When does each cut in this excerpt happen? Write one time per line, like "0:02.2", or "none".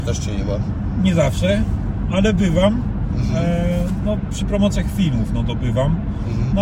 none